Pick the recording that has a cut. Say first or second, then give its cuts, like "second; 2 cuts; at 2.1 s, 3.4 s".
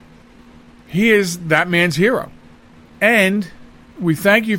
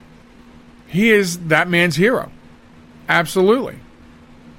first; 1 cut; at 2.9 s